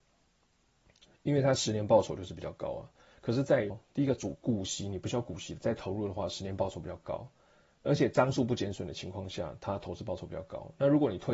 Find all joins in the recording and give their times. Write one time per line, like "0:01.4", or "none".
0:03.7